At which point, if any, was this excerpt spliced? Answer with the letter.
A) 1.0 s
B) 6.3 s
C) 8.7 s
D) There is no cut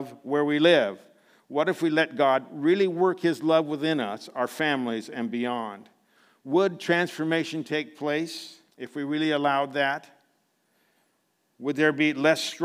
C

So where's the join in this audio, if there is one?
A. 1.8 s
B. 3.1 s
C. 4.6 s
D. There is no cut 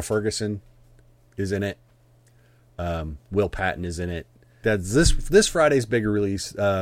C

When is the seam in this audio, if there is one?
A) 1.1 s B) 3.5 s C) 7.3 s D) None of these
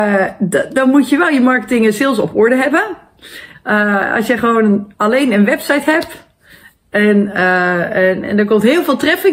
B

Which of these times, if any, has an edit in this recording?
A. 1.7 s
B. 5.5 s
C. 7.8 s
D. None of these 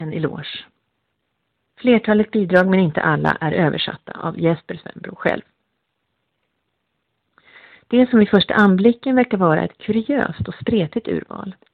A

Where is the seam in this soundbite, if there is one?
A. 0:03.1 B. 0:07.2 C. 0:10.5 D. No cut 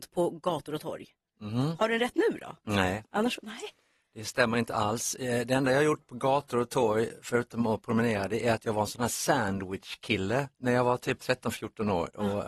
C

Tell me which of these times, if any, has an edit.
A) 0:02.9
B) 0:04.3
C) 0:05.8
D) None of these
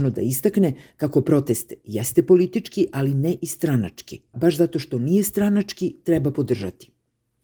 B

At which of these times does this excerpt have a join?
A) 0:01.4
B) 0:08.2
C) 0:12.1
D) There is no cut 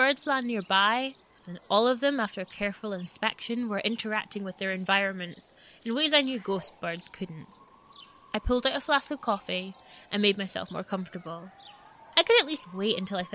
A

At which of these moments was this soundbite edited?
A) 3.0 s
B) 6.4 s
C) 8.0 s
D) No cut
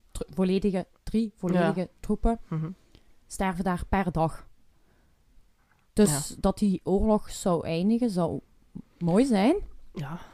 D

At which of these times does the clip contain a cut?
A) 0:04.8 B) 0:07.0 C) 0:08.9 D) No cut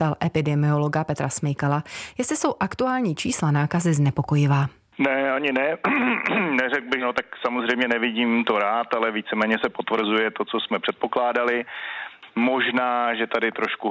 B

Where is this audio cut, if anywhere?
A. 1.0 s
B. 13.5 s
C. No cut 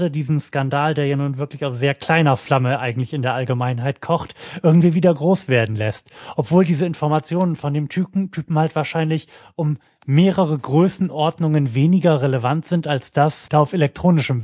B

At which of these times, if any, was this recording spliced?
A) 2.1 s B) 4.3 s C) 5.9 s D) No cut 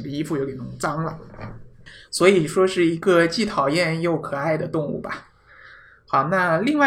D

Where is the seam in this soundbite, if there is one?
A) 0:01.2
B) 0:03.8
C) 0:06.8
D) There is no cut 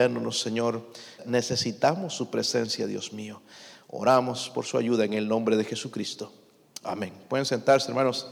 A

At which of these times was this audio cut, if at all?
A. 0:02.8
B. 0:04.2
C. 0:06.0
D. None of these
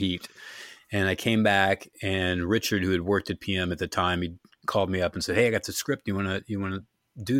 D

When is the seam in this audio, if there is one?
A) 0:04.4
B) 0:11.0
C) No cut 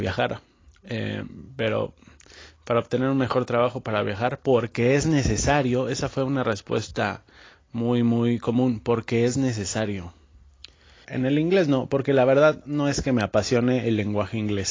B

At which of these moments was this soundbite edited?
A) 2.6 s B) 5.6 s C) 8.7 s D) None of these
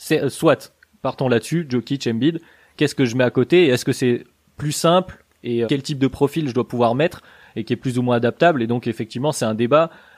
B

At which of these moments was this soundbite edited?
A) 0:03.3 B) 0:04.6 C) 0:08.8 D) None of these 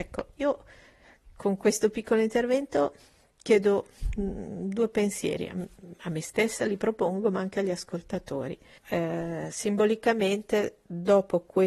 C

